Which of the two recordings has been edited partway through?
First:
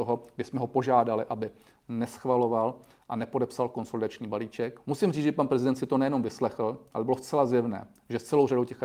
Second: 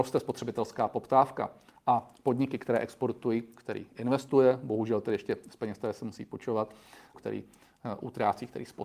second; 2 cuts; at 3.5 s, 7.1 s

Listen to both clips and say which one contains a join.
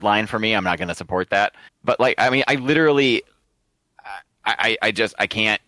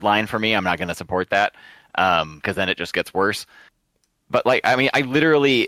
first; 1 cut; at 1.7 s

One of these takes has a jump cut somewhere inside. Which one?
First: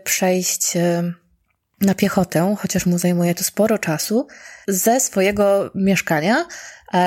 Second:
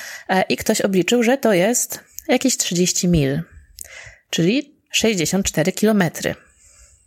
first; 1 cut; at 4.6 s

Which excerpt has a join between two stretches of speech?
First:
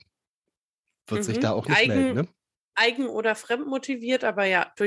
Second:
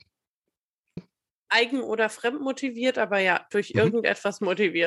second; 1 cut; at 1.0 s

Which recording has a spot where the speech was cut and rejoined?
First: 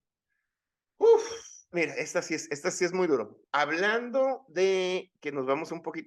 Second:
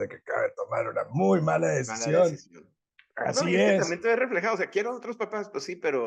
first; 2 cuts; at 1.7 s, 3.5 s

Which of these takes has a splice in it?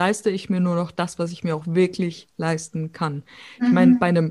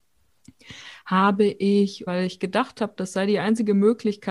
second; 1 cut; at 2.1 s

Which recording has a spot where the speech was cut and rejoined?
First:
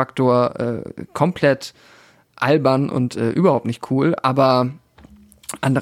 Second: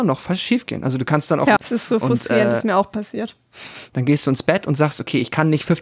second; 2 cuts; at 1.6 s, 3.9 s

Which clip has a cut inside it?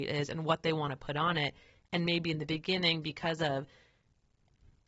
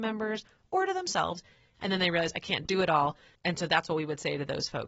second; 1 cut; at 3.4 s

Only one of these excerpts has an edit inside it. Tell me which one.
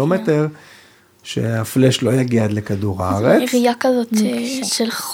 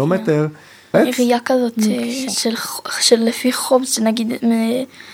second; 1 cut; at 0.9 s

